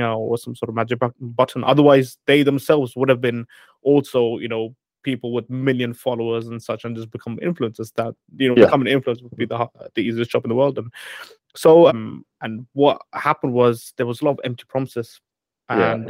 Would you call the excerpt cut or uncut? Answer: cut